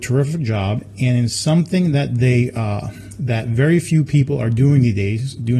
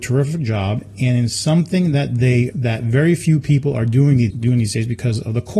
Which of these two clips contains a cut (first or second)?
second